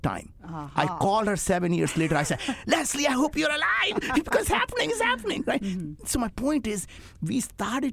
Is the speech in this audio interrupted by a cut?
no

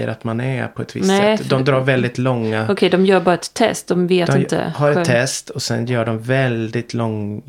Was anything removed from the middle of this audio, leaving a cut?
no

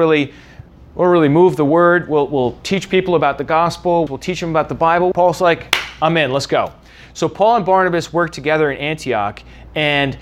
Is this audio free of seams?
no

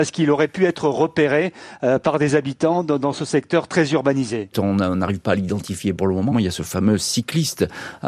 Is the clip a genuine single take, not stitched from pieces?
no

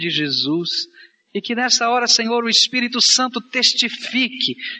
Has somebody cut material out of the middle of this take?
no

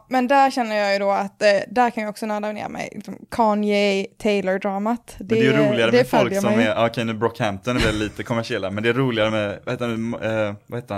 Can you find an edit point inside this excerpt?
yes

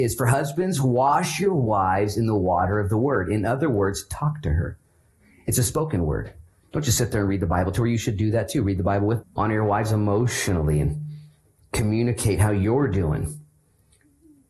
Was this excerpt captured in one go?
no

